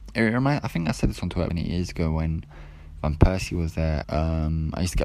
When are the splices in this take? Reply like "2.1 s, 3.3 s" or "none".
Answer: 1.5 s, 4.0 s